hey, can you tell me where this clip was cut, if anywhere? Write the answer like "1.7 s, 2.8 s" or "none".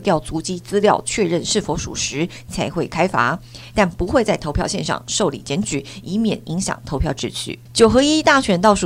7.7 s